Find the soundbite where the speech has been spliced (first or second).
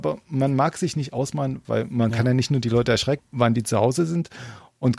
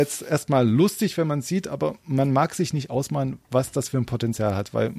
first